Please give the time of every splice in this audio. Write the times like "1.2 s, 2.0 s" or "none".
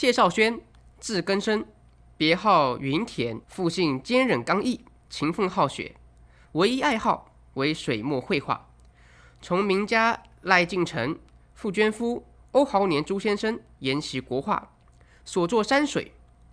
3.4 s, 6.5 s